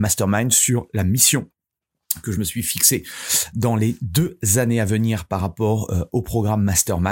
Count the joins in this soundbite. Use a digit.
0